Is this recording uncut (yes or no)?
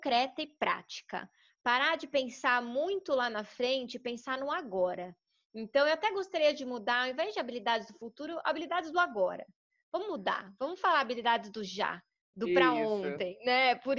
yes